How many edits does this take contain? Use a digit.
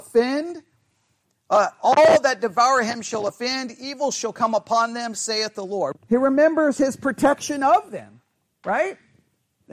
1